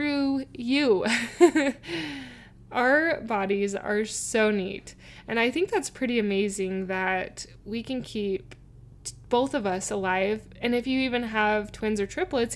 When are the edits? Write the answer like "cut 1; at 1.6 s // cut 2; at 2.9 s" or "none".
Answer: none

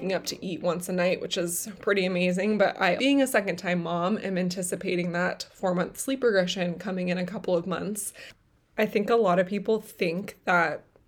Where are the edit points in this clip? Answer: cut 1; at 3.0 s

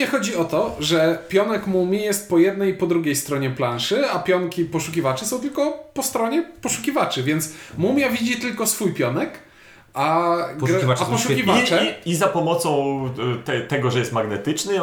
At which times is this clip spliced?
none

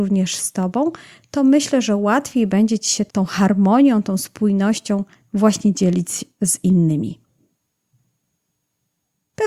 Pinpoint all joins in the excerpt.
cut 1; at 3.1 s

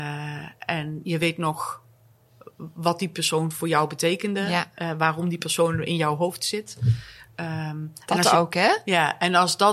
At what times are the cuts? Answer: none

